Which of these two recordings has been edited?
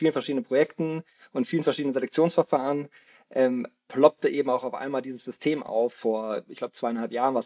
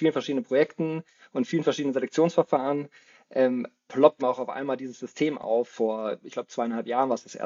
second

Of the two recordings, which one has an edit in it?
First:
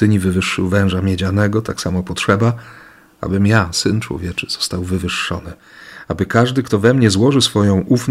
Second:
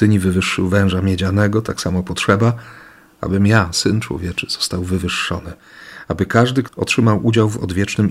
second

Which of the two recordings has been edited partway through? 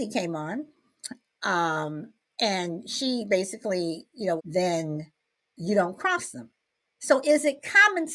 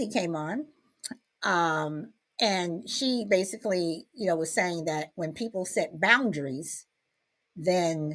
first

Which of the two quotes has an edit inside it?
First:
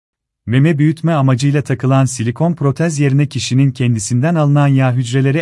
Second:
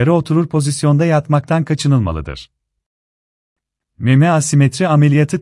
second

